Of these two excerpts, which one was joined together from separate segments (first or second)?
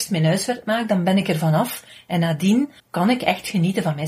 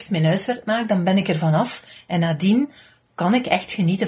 first